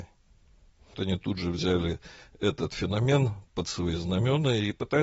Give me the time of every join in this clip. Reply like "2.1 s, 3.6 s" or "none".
0.9 s

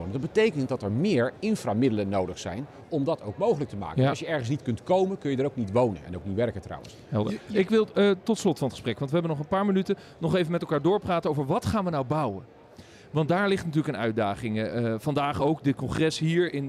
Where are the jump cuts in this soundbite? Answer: none

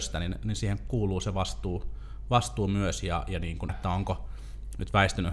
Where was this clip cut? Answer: 3.7 s

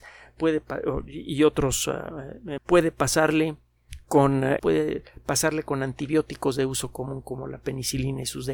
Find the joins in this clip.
2.6 s, 4.6 s

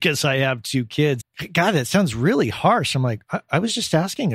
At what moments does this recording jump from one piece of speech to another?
1.2 s

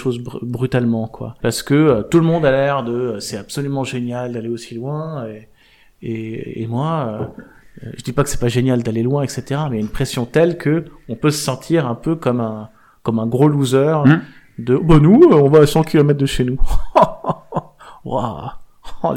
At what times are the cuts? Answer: 1.4 s

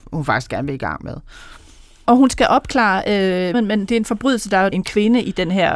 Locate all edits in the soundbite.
3.5 s, 4.7 s

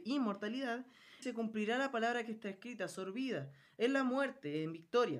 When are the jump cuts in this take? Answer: 1.2 s

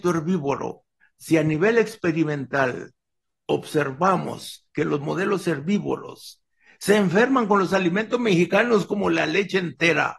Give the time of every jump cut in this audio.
1.0 s

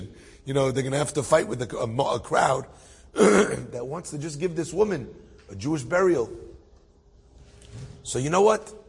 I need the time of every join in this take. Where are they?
none

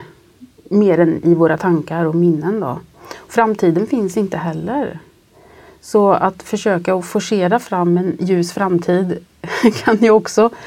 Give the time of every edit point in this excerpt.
none

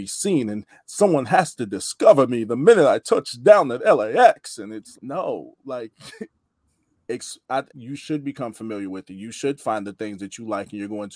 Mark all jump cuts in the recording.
4.9 s, 7.7 s

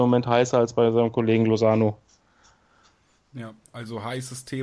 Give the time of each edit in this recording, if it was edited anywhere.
none

